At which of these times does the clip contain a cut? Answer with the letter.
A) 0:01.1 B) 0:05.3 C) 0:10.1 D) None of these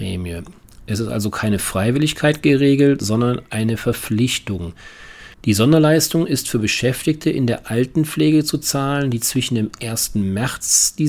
B